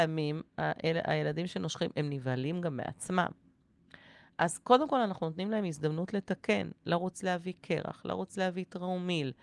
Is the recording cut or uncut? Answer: uncut